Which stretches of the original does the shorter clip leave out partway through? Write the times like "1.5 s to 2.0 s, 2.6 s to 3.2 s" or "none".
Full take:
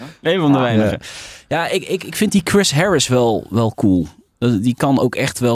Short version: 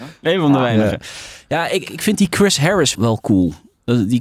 1.8 s to 2.0 s, 3.1 s to 3.5 s